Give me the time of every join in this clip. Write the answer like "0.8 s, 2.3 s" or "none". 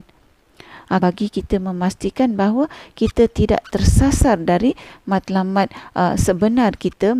1.0 s